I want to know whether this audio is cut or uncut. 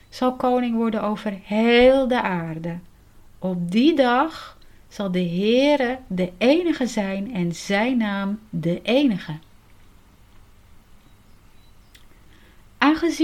uncut